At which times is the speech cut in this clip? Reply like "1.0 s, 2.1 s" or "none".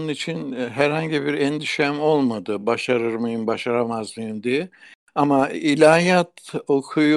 none